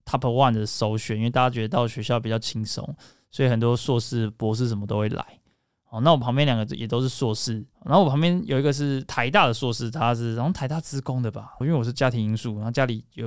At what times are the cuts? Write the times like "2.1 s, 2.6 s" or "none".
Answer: 7.7 s, 11.6 s